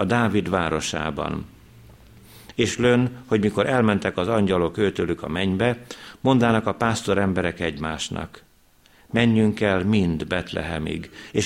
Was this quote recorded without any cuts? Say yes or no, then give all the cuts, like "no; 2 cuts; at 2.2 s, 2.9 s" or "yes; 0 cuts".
no; 1 cut; at 2.5 s